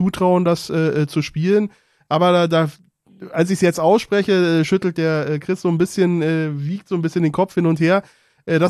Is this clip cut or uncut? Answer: uncut